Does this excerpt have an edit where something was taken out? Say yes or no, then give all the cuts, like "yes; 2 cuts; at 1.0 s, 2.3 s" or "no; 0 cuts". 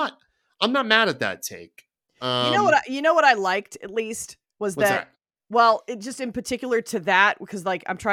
no; 0 cuts